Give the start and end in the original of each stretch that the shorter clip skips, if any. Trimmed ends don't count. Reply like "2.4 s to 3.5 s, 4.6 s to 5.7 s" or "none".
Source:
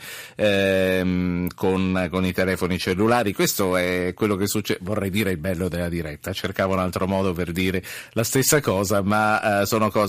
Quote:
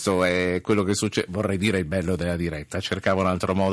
none